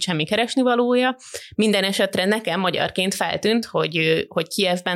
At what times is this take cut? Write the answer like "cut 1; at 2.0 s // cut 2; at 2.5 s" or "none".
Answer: none